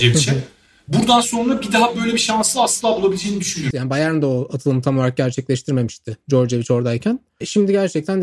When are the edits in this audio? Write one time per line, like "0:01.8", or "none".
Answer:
0:03.7